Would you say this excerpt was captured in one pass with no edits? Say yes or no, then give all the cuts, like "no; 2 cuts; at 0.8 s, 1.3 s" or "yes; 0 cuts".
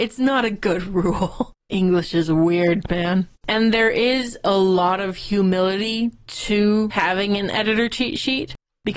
no; 2 cuts; at 1.6 s, 3.4 s